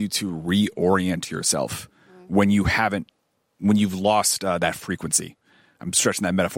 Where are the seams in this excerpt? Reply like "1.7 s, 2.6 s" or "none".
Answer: none